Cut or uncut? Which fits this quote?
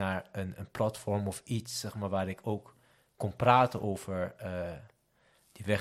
uncut